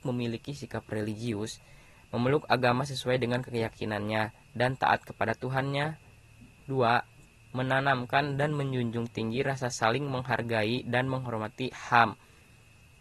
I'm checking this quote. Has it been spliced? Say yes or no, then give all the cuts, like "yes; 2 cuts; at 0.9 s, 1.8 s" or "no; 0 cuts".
no; 0 cuts